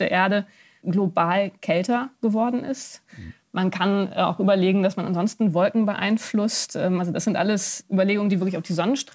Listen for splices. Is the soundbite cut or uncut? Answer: uncut